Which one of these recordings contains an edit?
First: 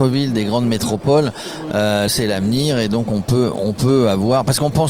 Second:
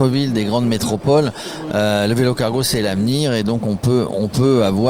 first; 1 cut; at 2.1 s

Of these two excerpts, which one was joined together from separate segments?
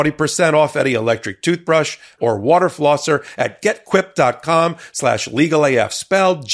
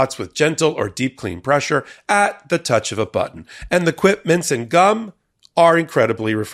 first; 1 cut; at 2.2 s

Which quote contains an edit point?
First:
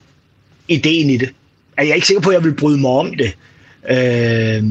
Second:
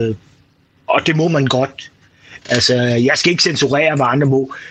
second; 1 cut; at 2.4 s

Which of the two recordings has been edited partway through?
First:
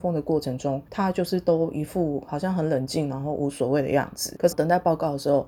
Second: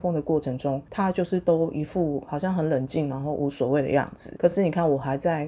first; 1 cut; at 4.5 s

